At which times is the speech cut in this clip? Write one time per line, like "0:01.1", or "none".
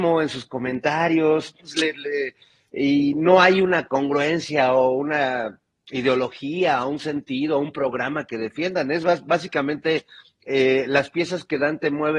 0:01.6